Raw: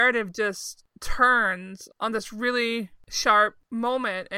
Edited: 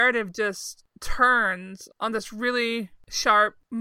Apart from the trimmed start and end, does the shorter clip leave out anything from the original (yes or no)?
no